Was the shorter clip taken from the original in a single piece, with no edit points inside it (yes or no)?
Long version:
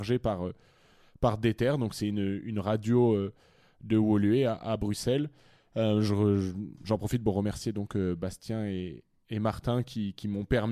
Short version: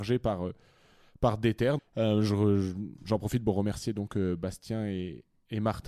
no